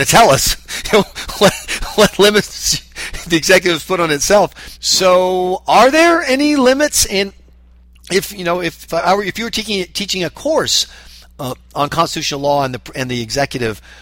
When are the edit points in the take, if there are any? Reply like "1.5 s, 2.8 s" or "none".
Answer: 4.8 s, 8.9 s

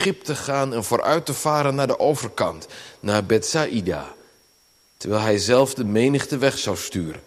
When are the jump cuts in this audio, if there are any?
none

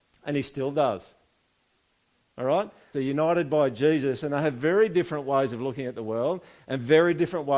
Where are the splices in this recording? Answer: 2.9 s

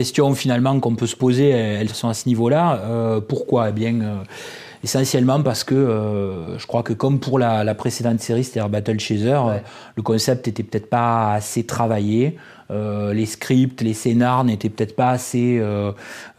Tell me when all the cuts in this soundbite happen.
1.9 s

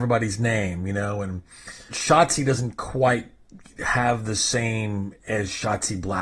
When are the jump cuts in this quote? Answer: 1.9 s

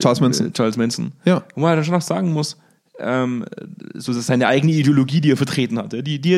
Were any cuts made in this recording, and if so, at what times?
none

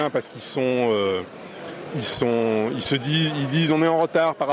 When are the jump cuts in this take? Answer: none

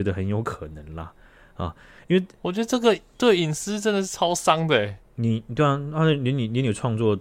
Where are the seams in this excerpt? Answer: none

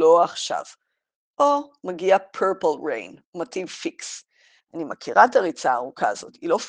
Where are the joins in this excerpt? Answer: 4.6 s

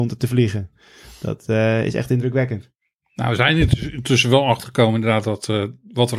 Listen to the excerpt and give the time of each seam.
none

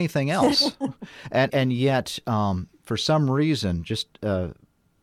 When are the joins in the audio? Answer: 1.5 s

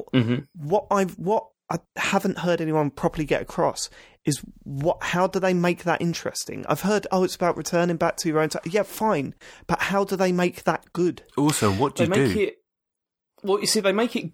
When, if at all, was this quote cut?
none

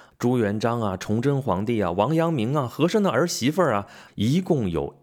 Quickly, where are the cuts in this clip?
4.1 s

